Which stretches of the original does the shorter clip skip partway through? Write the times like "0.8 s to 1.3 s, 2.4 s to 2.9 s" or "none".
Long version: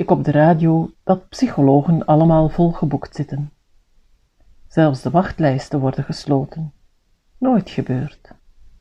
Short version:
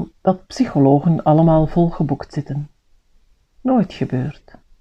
4.3 s to 7.3 s